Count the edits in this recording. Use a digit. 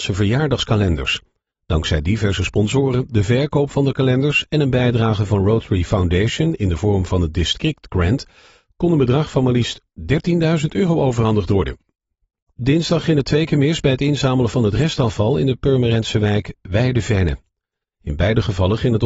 0